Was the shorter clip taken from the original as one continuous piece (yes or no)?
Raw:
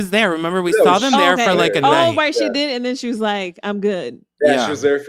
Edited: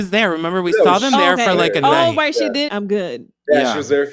no